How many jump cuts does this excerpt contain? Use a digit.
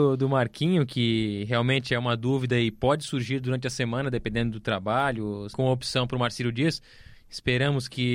1